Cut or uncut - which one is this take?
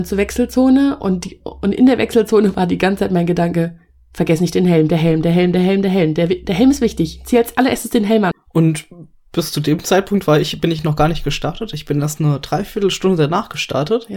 cut